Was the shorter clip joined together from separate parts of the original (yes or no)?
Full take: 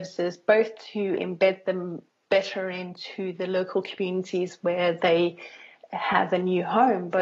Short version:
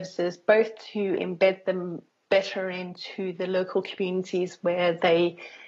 no